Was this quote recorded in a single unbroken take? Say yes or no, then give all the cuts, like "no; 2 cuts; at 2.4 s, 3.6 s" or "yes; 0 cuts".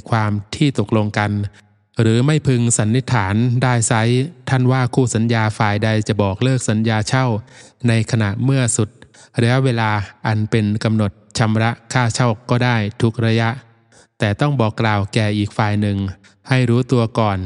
yes; 0 cuts